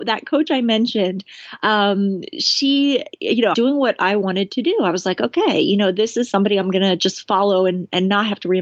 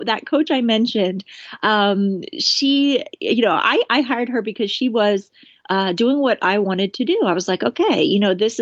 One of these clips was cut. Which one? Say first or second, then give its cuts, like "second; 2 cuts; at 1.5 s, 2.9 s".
first; 1 cut; at 3.5 s